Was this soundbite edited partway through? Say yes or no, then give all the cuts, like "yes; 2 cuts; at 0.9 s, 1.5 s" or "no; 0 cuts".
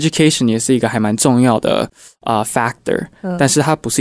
no; 0 cuts